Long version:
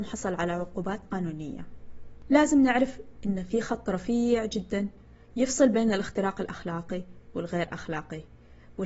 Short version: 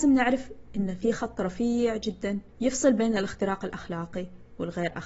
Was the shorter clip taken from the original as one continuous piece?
no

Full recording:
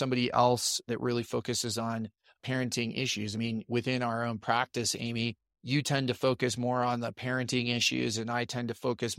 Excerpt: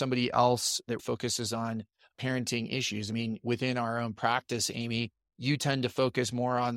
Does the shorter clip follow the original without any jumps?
no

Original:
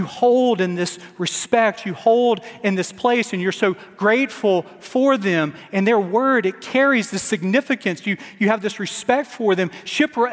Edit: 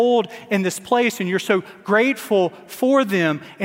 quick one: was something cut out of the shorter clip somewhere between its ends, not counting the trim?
no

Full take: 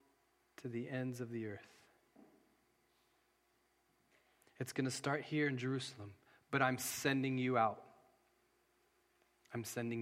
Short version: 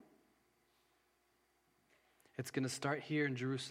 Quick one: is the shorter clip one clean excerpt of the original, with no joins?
yes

